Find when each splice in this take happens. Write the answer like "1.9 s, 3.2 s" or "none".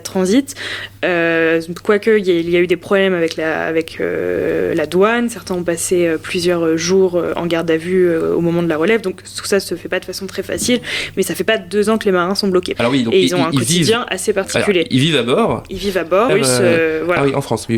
12.8 s, 16.3 s